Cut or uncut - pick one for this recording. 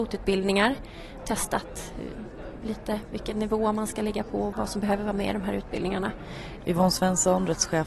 cut